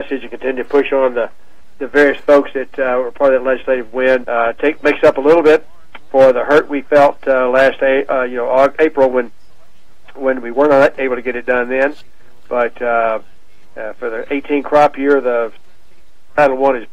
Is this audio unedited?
no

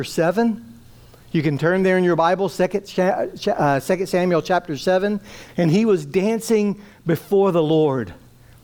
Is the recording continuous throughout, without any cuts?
no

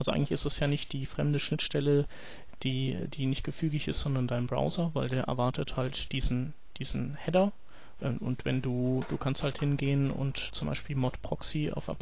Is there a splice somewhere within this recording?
yes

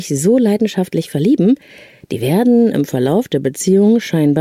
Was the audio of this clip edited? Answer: no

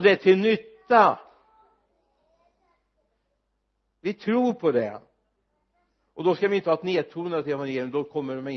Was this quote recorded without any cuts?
yes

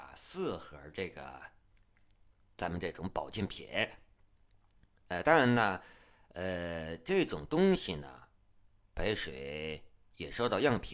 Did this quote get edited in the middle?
no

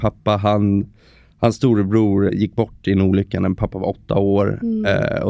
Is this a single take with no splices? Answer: no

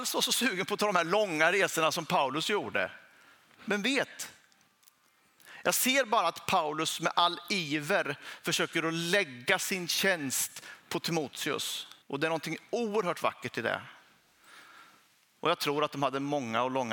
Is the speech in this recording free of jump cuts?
no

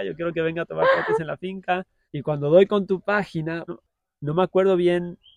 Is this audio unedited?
no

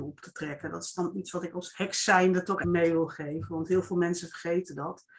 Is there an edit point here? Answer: yes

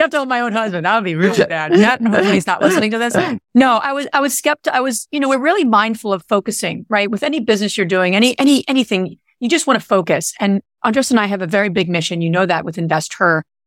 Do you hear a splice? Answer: no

